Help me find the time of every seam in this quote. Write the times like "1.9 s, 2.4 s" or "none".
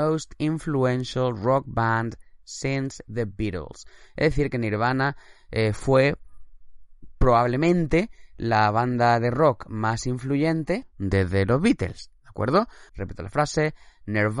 12.9 s